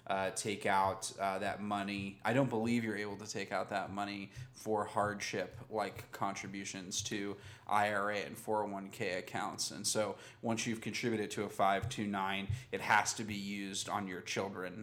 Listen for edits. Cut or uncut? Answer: uncut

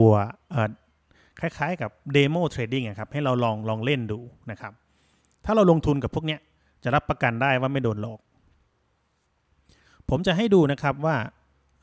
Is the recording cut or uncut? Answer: uncut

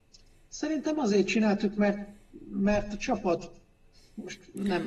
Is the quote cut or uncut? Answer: uncut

